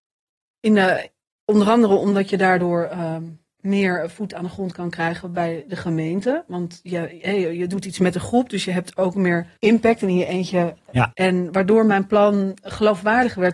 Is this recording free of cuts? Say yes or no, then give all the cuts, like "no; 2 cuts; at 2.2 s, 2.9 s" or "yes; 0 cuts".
no; 2 cuts; at 9.6 s, 11.1 s